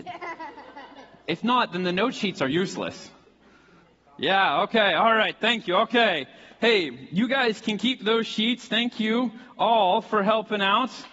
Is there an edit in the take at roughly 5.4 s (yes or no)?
no